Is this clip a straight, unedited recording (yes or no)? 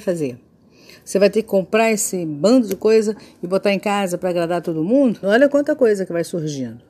no